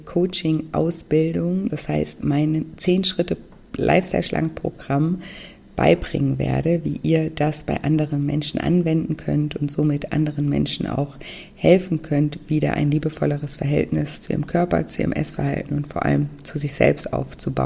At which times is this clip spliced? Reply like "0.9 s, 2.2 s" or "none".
1.7 s